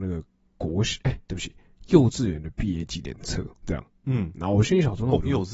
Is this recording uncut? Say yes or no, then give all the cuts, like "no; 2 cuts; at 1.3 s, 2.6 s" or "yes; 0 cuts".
no; 2 cuts; at 1.2 s, 3.5 s